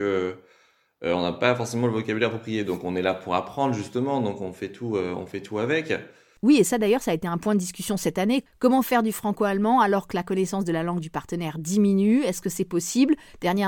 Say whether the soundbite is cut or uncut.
uncut